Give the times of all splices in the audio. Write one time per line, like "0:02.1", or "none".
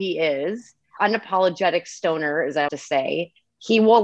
0:01.0
0:02.7